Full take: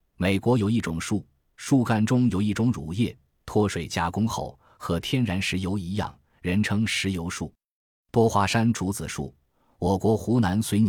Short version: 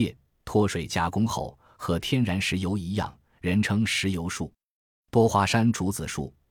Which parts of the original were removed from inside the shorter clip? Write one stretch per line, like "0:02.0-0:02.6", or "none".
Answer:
none

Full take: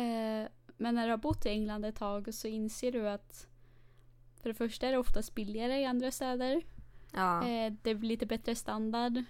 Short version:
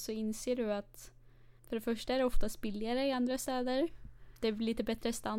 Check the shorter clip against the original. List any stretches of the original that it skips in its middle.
0:03.9-0:04.3
0:07.1-0:07.8

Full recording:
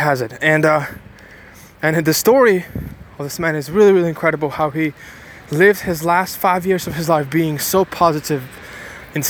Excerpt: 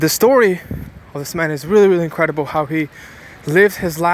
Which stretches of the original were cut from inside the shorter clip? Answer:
none

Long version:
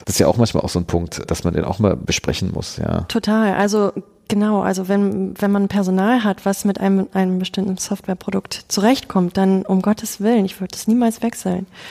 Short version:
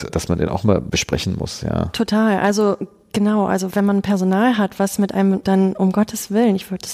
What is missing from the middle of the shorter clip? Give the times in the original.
0:04.9-0:05.4
0:07.1-0:09.3

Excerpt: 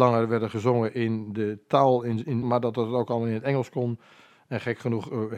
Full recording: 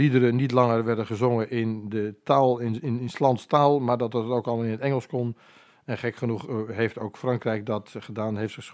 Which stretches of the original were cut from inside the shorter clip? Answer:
0:03.0-0:03.8

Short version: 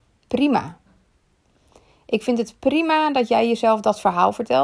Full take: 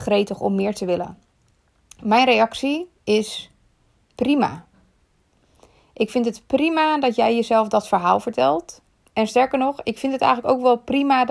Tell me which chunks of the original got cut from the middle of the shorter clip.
none

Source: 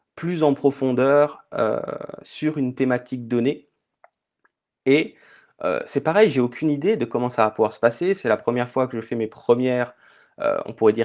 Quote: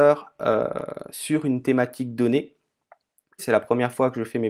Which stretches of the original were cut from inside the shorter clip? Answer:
0:04.5-0:08.2

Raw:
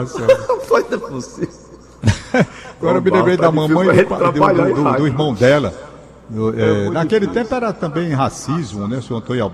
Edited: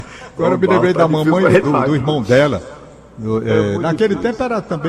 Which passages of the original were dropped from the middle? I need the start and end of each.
0:04.1-0:04.7

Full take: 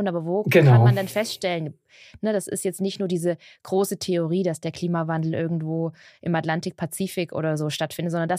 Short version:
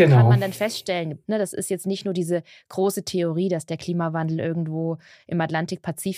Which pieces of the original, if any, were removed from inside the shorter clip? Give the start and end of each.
0:01.8-0:02.2

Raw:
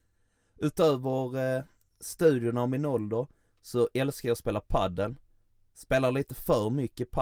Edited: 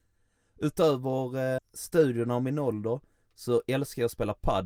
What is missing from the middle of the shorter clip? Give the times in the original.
0:01.6-0:01.8

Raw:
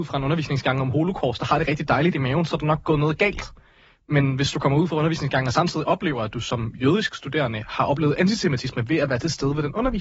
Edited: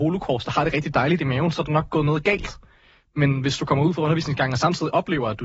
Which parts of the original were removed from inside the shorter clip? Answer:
none

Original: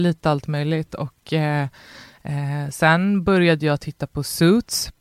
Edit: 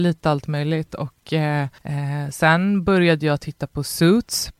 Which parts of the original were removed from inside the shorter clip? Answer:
0:01.8-0:02.2

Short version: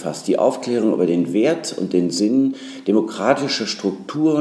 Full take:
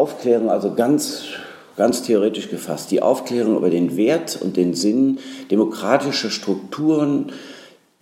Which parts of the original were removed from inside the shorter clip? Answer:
none

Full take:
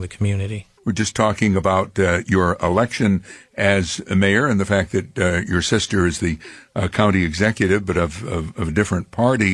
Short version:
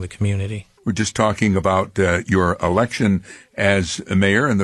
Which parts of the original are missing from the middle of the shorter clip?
none

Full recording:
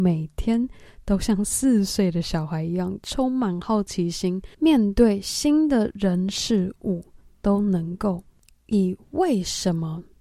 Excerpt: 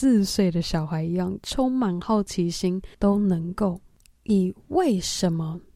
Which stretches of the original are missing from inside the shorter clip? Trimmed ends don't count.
0:04.5-0:07.4

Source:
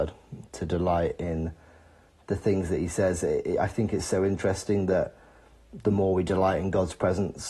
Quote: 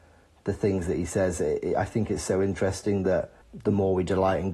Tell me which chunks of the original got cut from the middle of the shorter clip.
0:05.2-0:05.6

